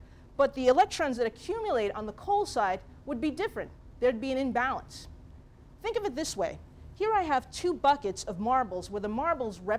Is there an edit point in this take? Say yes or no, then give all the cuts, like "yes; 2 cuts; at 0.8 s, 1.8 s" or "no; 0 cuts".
no; 0 cuts